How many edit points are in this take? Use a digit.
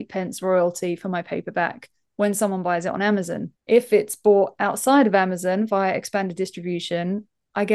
1